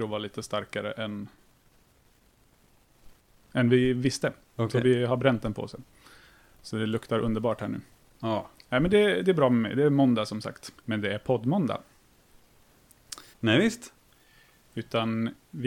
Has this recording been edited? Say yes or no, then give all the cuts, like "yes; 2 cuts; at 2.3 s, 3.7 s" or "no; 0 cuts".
yes; 2 cuts; at 10.8 s, 13.3 s